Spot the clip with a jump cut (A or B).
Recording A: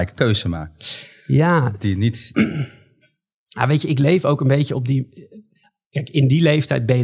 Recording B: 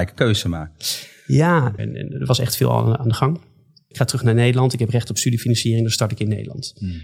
B